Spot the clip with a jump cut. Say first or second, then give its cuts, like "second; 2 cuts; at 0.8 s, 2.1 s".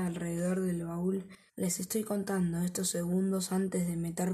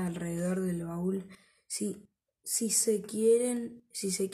first; 1 cut; at 1.5 s